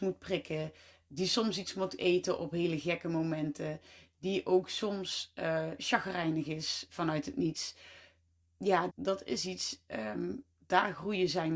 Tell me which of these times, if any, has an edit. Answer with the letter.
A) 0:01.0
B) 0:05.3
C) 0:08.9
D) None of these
C